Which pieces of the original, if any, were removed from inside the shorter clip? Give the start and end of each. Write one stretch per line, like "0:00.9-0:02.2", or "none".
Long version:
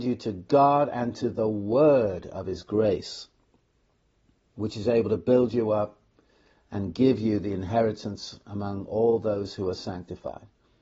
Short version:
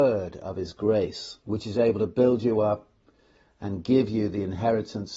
0:03.3-0:04.5